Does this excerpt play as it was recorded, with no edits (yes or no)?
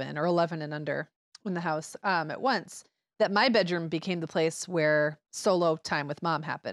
yes